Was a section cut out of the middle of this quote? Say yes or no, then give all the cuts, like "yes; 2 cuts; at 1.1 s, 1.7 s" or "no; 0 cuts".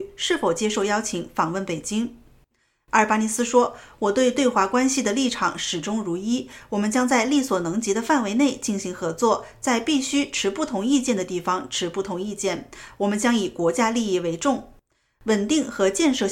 no; 0 cuts